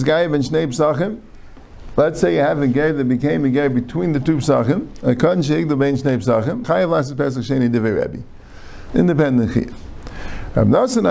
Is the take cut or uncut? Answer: cut